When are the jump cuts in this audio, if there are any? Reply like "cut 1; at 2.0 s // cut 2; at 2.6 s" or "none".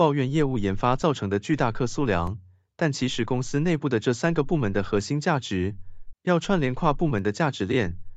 cut 1; at 6.1 s